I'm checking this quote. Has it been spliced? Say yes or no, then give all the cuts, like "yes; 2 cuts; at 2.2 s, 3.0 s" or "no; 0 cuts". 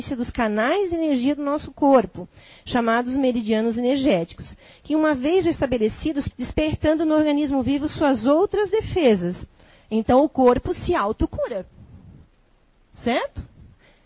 yes; 1 cut; at 6.3 s